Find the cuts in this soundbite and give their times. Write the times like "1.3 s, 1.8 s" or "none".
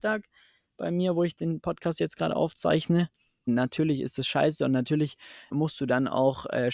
3.5 s, 5.5 s